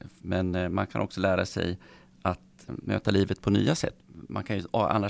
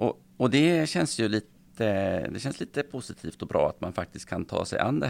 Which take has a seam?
first; 2 cuts; at 2.7 s, 4.0 s

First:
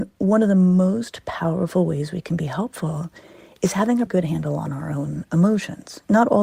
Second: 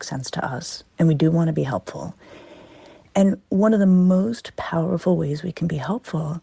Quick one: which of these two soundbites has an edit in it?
first; 1 cut; at 4.1 s

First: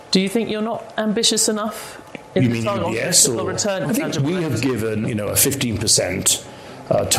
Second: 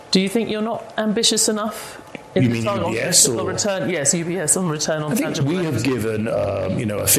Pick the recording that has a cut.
first; 2 cuts; at 3.8 s, 5.0 s

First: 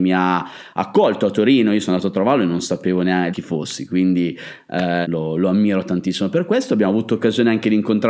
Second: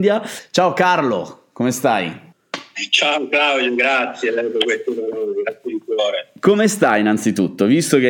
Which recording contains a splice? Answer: first; 2 cuts; at 3.3 s, 5.0 s

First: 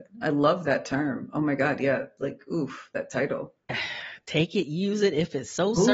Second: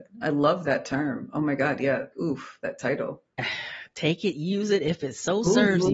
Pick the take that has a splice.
second; 1 cut; at 2.1 s

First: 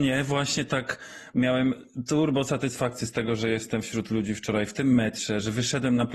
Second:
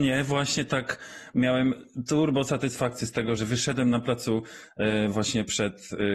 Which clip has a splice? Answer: second; 1 cut; at 3.4 s

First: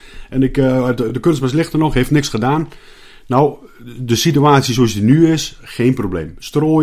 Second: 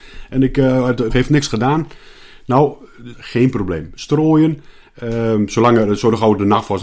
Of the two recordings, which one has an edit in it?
second; 2 cuts; at 1.1 s, 3.1 s

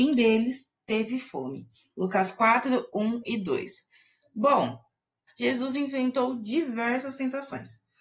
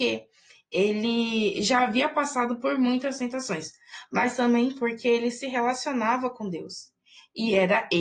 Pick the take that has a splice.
first; 1 cut; at 5.3 s

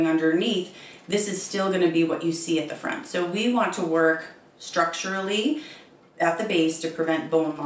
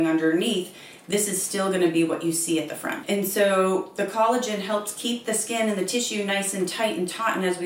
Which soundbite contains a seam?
second; 1 cut; at 3.0 s

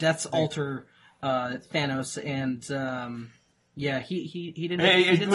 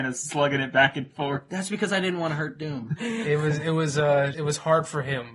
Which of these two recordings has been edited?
second; 2 cuts; at 3.0 s, 4.3 s

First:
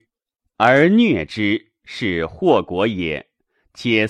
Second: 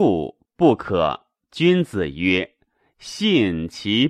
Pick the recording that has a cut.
second; 1 cut; at 1.5 s

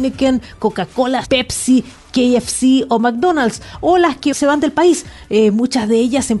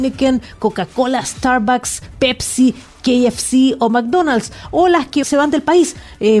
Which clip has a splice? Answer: first; 1 cut; at 1.2 s

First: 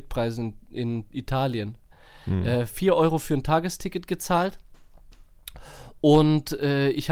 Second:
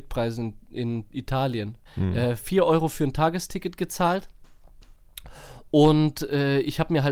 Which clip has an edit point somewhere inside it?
second; 1 cut; at 1.9 s

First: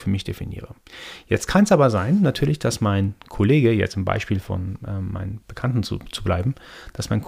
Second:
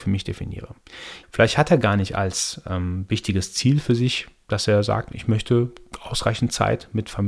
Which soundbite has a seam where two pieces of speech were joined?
second; 1 cut; at 1.2 s

